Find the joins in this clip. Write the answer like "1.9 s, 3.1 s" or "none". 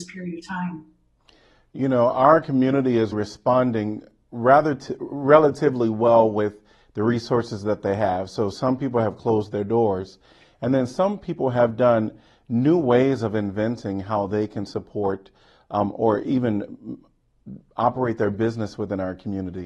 3.1 s

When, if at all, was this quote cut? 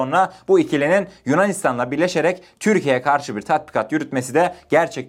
none

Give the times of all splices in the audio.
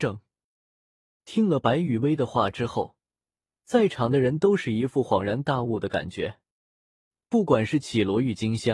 1.2 s

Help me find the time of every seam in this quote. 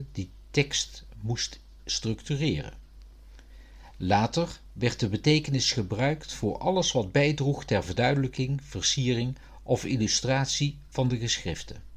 none

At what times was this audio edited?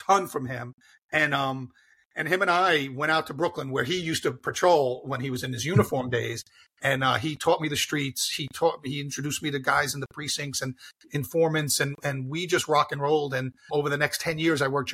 13.7 s

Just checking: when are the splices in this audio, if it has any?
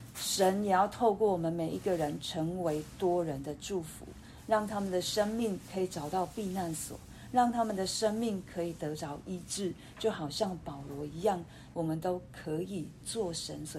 11.7 s

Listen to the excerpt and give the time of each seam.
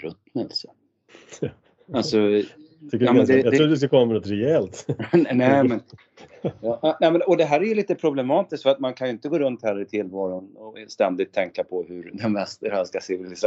none

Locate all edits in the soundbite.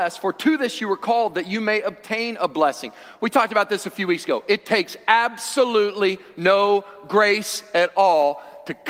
none

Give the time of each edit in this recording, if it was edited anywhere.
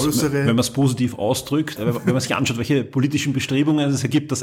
1.8 s

